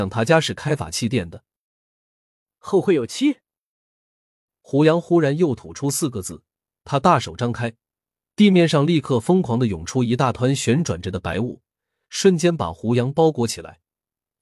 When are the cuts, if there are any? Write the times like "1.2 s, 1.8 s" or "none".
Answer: none